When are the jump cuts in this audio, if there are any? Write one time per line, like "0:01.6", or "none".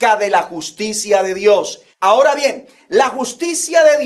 0:01.9